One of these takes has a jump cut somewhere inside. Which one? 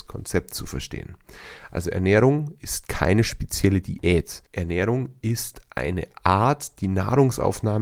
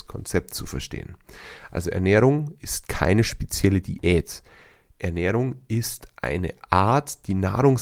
first; 1 cut; at 4.5 s

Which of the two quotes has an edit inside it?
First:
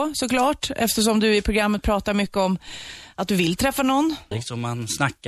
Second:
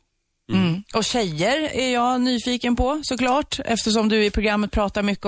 first; 1 cut; at 4.3 s

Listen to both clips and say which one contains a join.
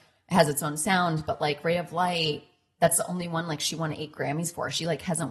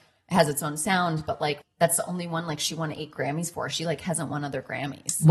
second; 1 cut; at 1.6 s

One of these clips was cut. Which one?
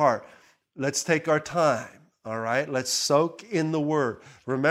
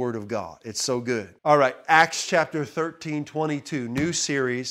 second; 1 cut; at 1.4 s

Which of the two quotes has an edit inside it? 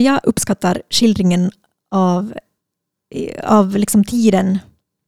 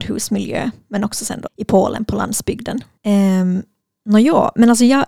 second; 2 cuts; at 1.5 s, 3.0 s

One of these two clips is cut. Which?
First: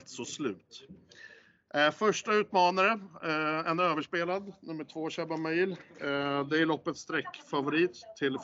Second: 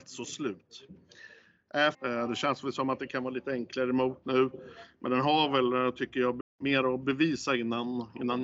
second; 2 cuts; at 1.9 s, 6.4 s

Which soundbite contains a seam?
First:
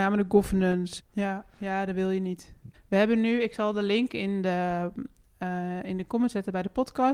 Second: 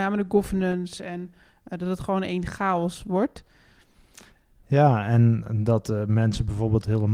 first; 2 cuts; at 1.0 s, 2.7 s

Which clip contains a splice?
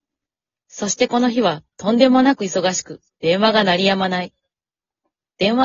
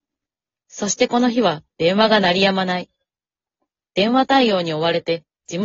second; 1 cut; at 1.7 s

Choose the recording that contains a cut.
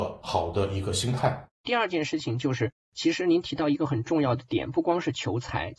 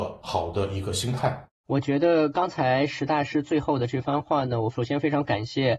first; 1 cut; at 1.5 s

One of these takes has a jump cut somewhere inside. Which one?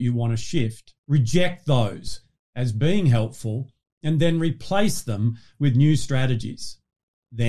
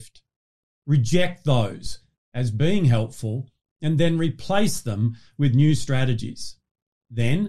first; 1 cut; at 1.0 s

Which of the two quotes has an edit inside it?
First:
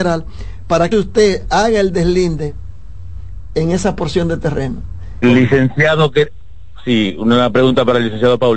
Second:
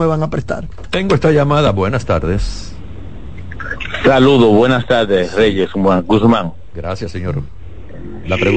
first; 2 cuts; at 0.9 s, 5.2 s

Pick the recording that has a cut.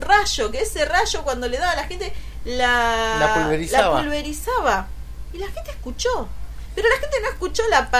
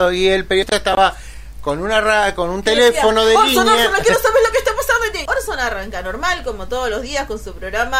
second; 1 cut; at 5.3 s

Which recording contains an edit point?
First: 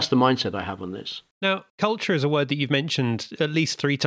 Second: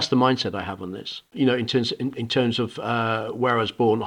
second; 1 cut; at 1.3 s

